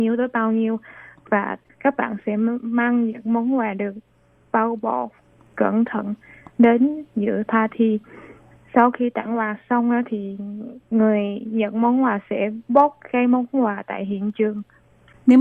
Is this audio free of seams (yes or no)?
yes